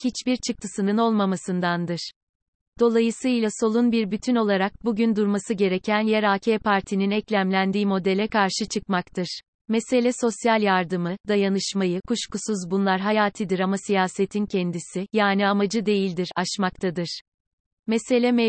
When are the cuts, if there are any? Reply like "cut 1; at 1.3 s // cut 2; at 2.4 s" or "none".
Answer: cut 1; at 9.6 s